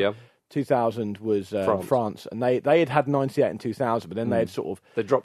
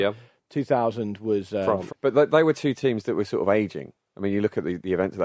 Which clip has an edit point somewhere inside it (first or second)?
second